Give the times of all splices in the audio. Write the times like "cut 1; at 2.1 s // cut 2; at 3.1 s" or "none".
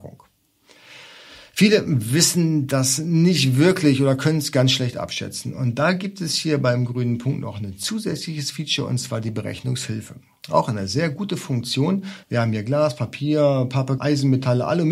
cut 1; at 12.2 s // cut 2; at 14.0 s